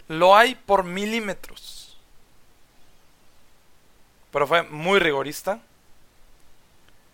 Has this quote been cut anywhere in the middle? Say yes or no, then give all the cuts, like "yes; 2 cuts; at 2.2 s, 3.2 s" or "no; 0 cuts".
no; 0 cuts